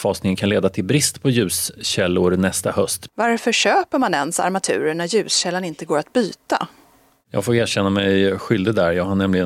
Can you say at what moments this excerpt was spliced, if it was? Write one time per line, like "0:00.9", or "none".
0:03.1